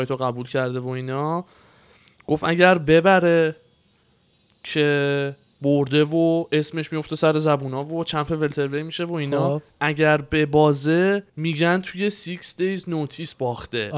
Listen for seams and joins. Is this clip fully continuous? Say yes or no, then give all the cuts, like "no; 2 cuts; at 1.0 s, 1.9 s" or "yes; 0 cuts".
no; 1 cut; at 11.3 s